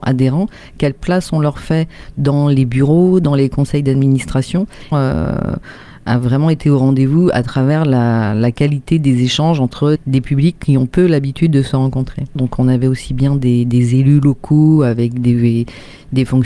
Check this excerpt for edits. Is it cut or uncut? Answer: cut